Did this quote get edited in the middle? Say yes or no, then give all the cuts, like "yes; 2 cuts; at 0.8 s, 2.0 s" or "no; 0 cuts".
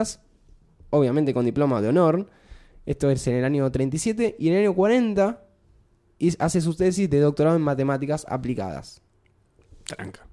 no; 0 cuts